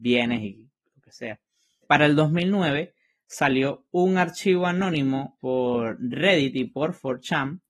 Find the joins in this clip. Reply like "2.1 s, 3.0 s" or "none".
1.8 s, 5.4 s